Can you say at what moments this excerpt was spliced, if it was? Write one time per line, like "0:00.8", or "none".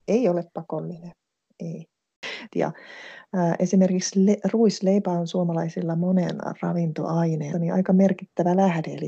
0:02.5
0:07.5